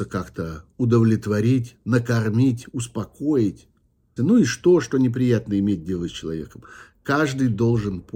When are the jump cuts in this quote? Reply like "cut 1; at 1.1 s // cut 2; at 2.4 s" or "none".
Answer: cut 1; at 4.2 s